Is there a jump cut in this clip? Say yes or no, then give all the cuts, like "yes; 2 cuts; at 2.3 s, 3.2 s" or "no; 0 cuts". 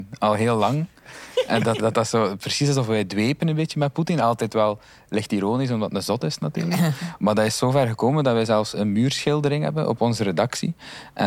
yes; 1 cut; at 1.8 s